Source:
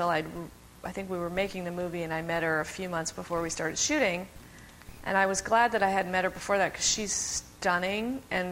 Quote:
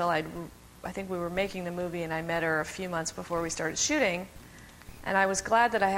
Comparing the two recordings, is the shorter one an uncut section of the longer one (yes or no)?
yes